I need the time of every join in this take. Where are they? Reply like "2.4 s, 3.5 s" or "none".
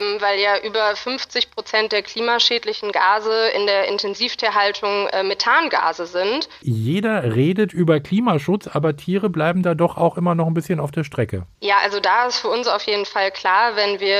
6.6 s, 11.6 s